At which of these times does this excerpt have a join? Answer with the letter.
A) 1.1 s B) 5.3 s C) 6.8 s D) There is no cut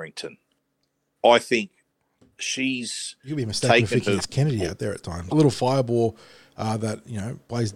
B